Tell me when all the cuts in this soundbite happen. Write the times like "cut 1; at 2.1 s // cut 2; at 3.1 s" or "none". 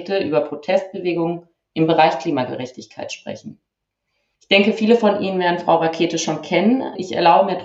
none